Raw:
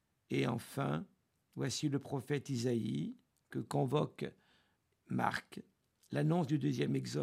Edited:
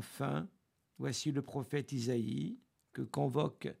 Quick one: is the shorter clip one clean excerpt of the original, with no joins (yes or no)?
yes